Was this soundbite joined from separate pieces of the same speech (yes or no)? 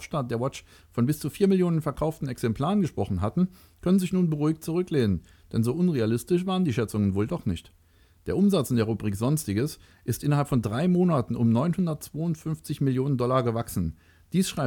no